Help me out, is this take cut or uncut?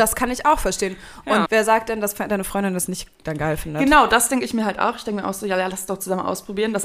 cut